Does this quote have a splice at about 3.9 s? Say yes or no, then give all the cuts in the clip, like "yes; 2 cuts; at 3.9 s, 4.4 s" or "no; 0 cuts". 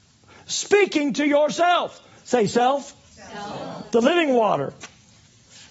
yes; 1 cut; at 3.9 s